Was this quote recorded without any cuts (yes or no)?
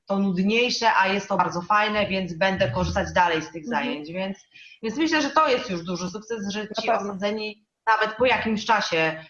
yes